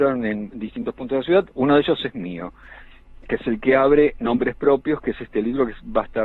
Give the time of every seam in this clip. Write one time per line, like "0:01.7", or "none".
none